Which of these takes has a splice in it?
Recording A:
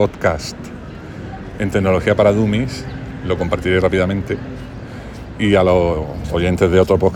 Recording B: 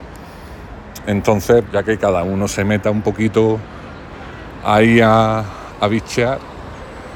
B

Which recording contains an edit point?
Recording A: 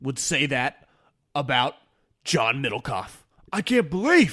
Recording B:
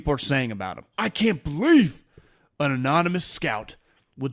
B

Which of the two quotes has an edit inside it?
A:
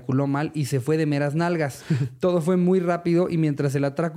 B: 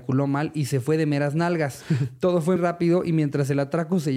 B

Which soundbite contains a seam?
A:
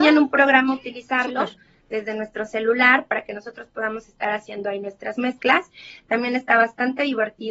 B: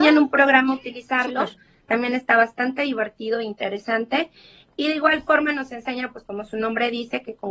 B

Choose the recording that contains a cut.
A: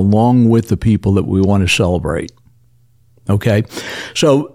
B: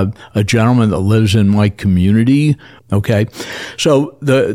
B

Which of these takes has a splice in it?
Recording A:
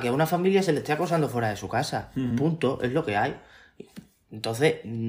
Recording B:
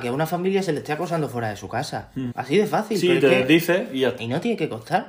B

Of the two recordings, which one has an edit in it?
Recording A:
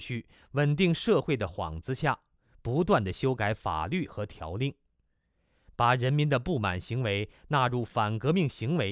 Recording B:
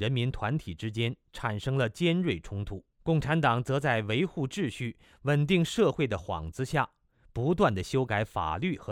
B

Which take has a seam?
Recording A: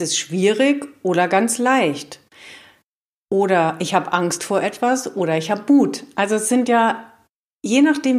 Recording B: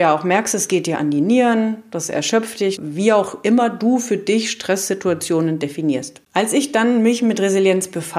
B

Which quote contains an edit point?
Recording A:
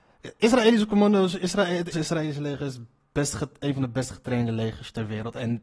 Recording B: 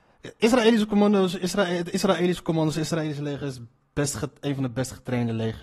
A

